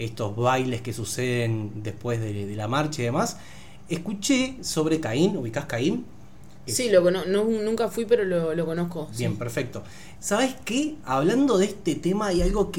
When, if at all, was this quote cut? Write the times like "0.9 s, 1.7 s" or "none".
10.2 s